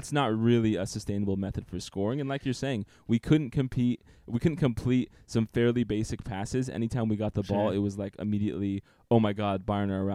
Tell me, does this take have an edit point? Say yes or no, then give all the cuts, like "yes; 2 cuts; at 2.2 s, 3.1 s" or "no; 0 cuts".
no; 0 cuts